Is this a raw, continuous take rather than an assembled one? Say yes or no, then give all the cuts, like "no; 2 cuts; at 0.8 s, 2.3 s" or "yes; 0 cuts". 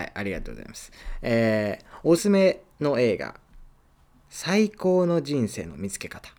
no; 1 cut; at 2.2 s